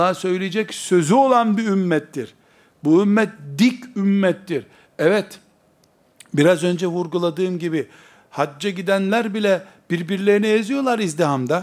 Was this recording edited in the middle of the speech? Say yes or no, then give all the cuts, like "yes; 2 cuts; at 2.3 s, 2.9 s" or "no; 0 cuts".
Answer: yes; 1 cut; at 8.2 s